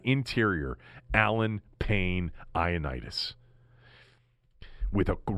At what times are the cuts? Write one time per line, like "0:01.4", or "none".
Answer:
none